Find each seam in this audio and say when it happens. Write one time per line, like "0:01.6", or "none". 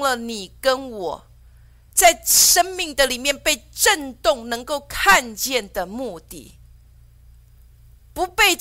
none